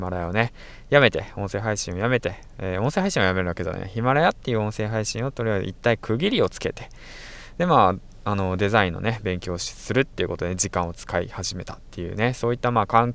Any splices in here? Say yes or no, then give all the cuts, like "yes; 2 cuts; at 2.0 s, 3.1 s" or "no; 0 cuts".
no; 0 cuts